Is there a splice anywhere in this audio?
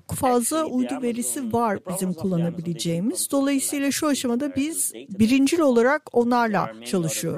no; 0 cuts

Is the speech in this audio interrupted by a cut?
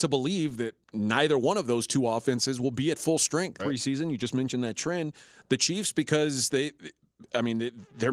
yes; 1 cut; at 3.6 s

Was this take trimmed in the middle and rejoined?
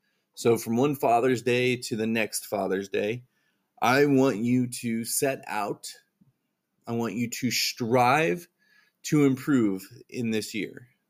no; 0 cuts

